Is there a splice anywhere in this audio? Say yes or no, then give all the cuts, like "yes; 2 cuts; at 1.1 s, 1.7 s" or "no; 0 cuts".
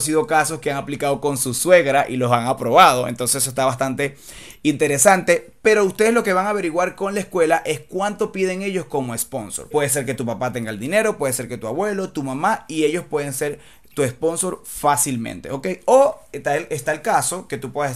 yes; 1 cut; at 9.7 s